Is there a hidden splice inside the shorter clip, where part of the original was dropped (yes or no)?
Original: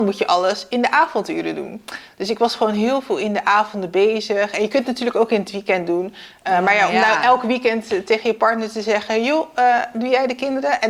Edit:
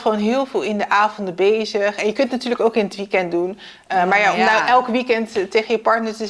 no